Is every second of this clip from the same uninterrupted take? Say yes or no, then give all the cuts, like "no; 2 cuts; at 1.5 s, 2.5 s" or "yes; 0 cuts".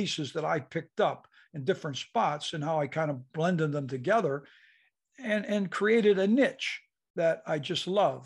yes; 0 cuts